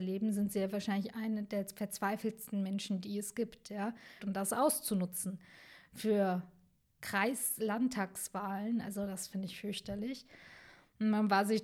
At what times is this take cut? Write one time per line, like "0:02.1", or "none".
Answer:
0:04.2